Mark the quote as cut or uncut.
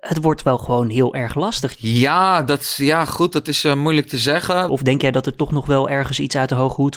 cut